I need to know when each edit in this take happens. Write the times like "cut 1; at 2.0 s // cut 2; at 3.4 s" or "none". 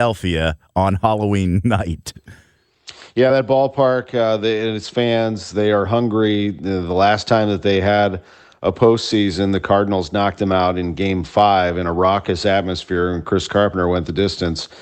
none